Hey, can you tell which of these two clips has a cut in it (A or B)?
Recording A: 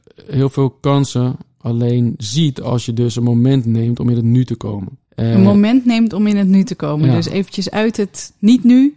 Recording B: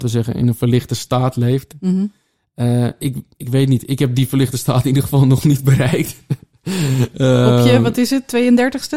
A